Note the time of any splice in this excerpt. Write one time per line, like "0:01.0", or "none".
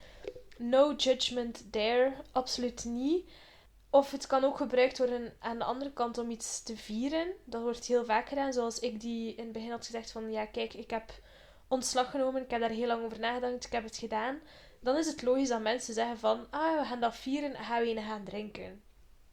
none